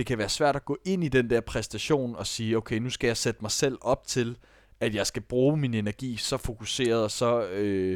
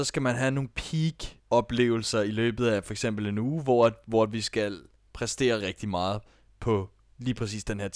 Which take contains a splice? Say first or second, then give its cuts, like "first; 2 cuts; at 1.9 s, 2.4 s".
second; 2 cuts; at 1.4 s, 5.6 s